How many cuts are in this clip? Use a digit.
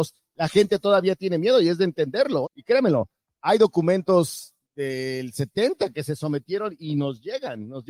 2